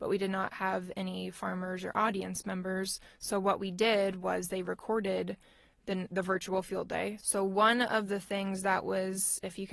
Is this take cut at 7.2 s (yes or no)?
yes